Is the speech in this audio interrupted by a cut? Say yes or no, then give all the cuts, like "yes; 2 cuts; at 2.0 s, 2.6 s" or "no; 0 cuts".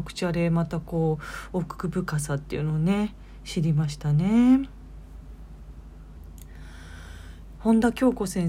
yes; 1 cut; at 7.6 s